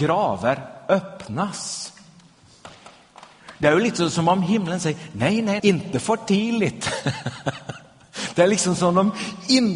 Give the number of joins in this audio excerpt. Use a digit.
1